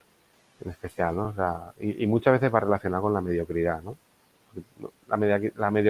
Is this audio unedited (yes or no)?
yes